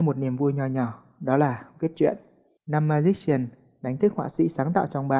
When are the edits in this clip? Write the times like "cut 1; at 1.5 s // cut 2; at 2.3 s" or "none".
cut 1; at 2.6 s

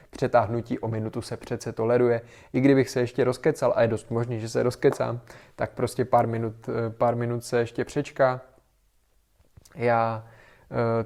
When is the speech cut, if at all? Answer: none

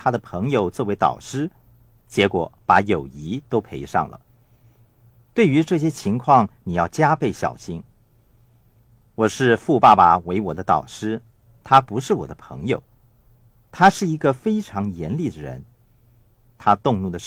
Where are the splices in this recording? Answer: none

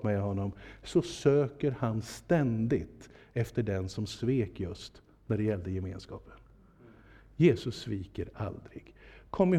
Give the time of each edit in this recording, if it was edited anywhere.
none

